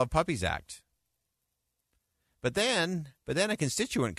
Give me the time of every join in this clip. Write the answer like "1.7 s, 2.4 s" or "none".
3.2 s